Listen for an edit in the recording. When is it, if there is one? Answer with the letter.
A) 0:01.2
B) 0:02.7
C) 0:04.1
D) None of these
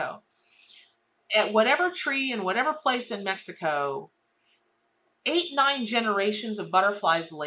D